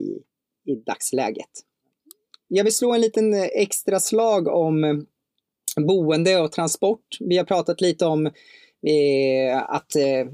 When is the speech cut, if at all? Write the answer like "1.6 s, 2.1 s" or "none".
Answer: none